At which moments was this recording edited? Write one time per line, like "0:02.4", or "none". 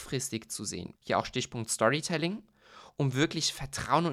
0:01.0